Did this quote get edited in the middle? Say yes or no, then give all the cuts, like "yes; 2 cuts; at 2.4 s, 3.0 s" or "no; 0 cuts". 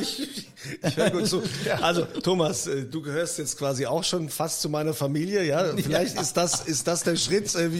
no; 0 cuts